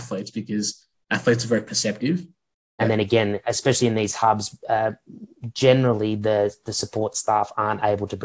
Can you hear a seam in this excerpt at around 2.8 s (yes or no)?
yes